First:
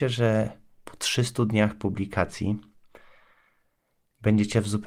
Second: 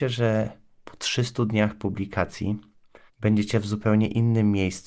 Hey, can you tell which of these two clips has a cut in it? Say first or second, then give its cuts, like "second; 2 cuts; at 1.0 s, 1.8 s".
second; 1 cut; at 3.1 s